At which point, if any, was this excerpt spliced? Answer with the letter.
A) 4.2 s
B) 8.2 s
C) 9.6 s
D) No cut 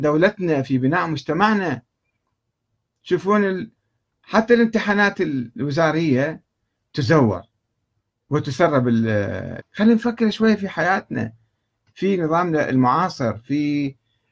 C